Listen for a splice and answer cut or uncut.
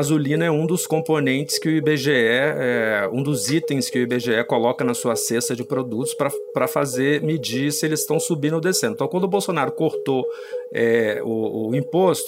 uncut